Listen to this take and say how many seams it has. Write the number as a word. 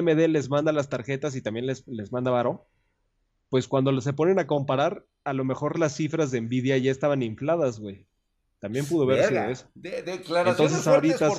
zero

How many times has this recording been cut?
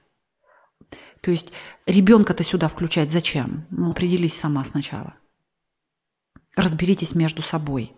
one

